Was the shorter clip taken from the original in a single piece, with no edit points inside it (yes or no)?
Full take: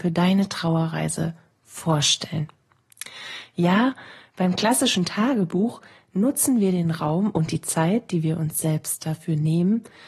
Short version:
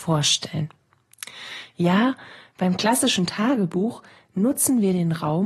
yes